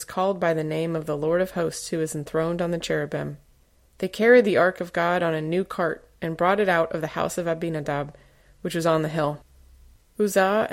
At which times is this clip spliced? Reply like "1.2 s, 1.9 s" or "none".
none